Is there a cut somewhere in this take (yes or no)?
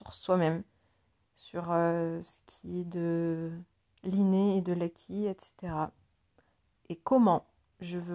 no